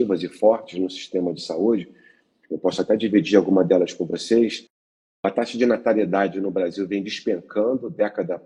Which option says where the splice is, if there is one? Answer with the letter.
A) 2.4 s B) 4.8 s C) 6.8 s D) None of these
D